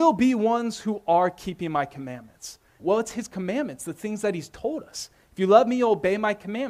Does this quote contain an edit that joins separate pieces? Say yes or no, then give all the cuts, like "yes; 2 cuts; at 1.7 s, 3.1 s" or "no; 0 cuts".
yes; 1 cut; at 2.8 s